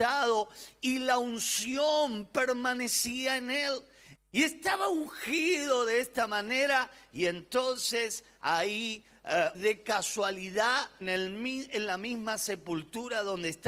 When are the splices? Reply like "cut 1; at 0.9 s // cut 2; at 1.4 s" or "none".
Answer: cut 1; at 4.2 s // cut 2; at 9.5 s // cut 3; at 11.0 s